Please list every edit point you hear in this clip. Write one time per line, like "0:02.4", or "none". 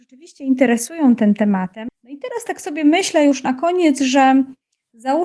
0:01.9